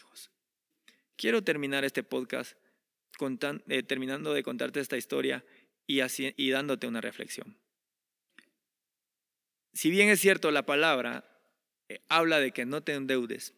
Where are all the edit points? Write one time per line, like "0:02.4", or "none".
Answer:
0:06.3